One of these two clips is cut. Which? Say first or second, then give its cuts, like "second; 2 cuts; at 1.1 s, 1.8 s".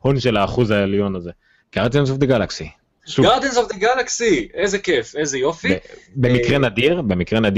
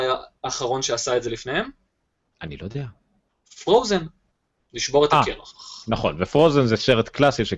first; 1 cut; at 1.6 s